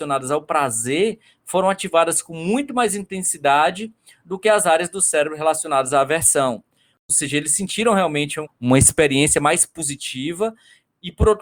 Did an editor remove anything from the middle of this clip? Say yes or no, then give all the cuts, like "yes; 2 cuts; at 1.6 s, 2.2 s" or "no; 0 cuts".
yes; 1 cut; at 8.5 s